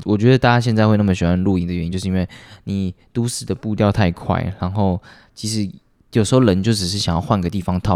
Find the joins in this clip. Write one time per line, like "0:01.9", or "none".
none